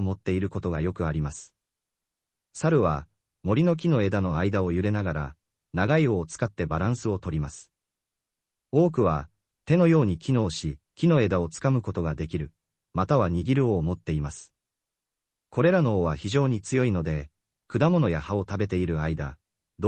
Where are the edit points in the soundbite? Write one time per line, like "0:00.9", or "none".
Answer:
0:10.8